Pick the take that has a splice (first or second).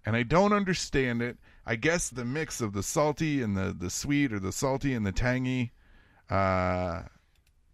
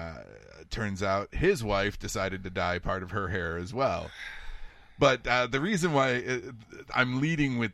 first